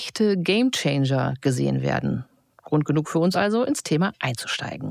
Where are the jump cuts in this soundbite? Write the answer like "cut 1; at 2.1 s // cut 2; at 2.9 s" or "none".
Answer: none